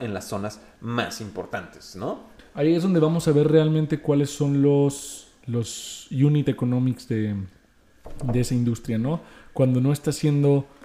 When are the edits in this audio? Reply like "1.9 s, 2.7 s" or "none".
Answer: 2.4 s